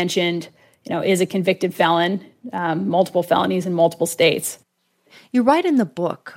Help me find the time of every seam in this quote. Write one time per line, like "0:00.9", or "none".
none